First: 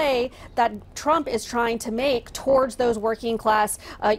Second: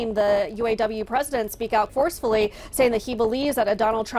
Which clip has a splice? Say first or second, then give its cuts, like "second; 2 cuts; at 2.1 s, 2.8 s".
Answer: second; 1 cut; at 1.9 s